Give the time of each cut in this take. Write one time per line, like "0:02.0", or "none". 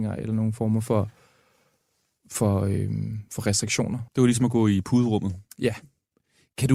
0:04.1